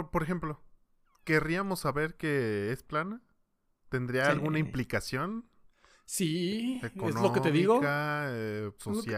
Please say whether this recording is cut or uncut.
uncut